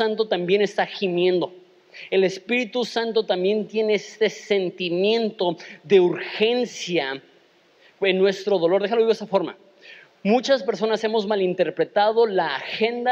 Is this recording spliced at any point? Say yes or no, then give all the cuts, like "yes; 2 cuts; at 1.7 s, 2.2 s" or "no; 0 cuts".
no; 0 cuts